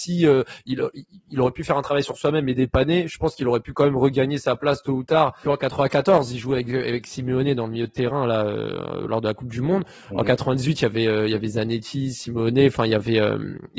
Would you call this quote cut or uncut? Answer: cut